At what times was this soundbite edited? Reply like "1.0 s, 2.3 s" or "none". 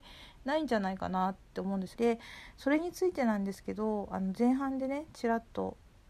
1.9 s